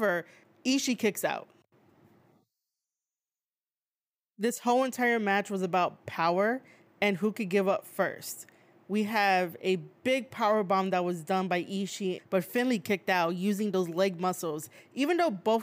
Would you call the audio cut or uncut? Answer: cut